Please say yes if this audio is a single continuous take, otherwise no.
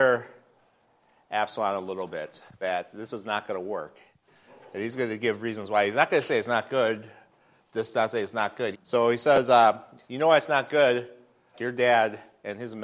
no